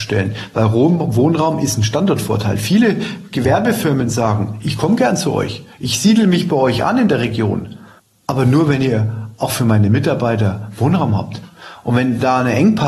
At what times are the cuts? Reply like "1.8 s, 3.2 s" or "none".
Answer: none